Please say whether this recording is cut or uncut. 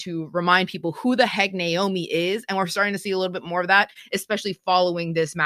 uncut